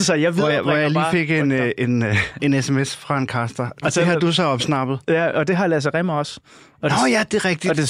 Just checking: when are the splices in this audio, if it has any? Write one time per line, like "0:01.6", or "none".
0:02.4
0:03.8